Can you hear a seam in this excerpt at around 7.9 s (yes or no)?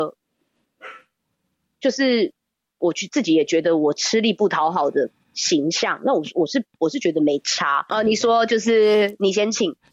yes